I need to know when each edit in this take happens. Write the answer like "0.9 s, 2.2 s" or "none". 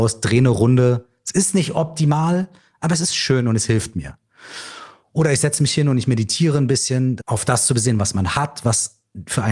7.2 s